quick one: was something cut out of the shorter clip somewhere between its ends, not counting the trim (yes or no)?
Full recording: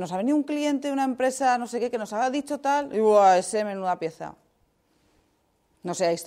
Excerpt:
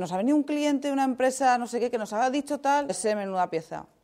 yes